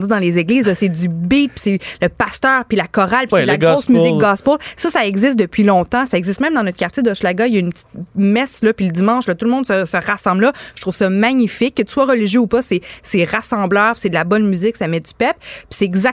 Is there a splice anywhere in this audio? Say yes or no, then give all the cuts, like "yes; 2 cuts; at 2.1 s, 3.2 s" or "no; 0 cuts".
no; 0 cuts